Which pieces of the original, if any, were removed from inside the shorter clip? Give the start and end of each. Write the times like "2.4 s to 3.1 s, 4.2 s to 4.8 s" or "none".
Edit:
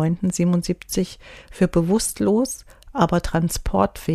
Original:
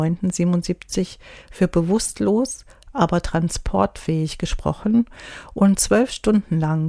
none